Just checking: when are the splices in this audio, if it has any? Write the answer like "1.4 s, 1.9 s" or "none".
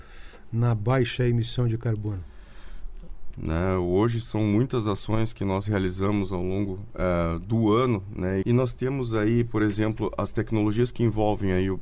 3.3 s, 8.4 s